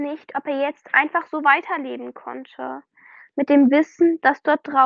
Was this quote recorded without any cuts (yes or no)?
yes